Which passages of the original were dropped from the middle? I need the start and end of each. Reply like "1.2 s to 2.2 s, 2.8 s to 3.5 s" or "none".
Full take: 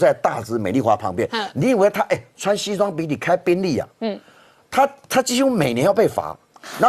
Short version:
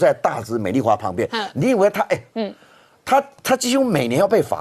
2.3 s to 3.9 s